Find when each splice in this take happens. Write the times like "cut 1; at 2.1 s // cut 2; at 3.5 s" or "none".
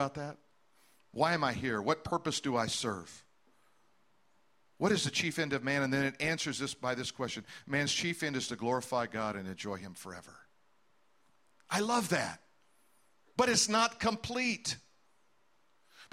none